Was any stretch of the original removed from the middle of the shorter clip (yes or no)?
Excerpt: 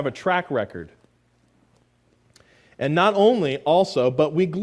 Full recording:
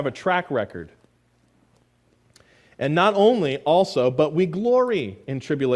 no